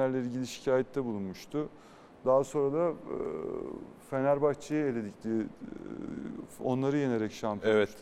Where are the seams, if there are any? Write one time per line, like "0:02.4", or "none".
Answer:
none